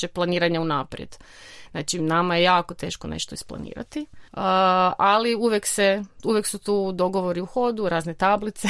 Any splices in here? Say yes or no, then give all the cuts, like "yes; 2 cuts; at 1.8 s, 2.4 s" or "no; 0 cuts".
yes; 1 cut; at 4.3 s